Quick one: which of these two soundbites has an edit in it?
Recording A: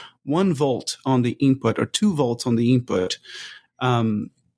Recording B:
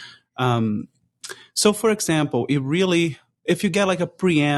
A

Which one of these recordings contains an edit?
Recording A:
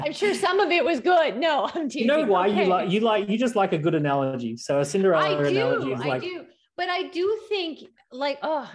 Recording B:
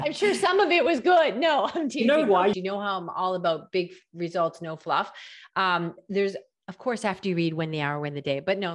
B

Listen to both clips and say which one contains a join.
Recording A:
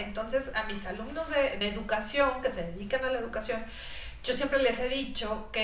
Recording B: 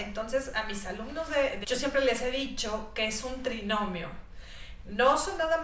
B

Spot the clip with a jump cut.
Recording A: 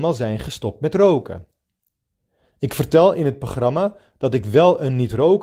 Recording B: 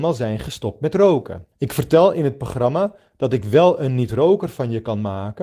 B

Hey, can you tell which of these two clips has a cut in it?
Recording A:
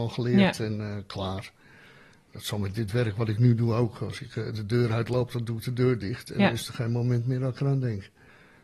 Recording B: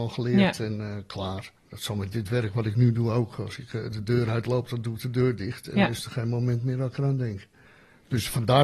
B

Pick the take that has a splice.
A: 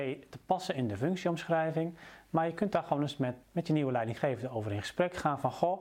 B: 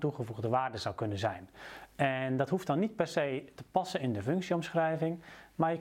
A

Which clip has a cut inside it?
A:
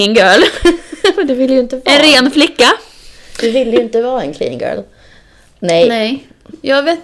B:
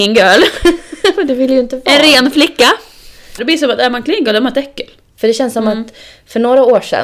B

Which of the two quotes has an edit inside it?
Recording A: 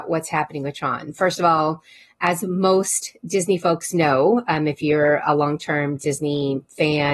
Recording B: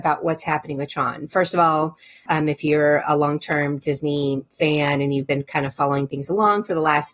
B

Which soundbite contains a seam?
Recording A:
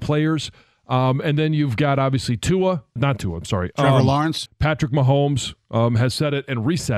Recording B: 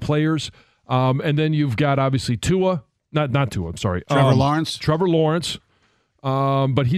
A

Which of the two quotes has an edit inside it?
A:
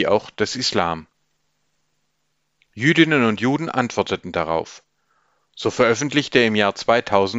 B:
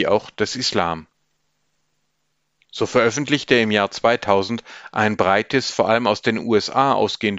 B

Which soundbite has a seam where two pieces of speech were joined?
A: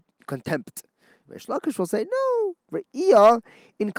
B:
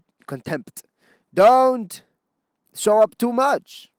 A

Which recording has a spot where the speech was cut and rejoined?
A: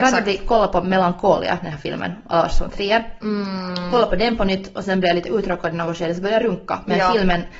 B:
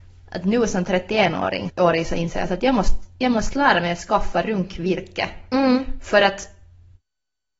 B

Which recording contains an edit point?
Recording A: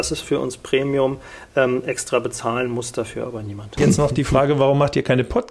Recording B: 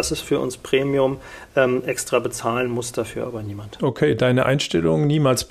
A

